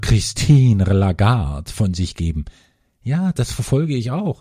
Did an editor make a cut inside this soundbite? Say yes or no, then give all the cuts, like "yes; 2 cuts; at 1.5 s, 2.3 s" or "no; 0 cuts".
no; 0 cuts